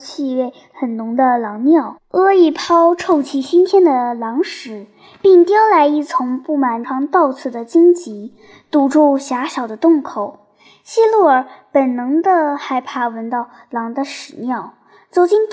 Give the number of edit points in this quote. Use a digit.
1